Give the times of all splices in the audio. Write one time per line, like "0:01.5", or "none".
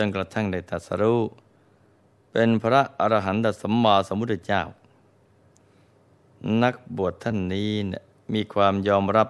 none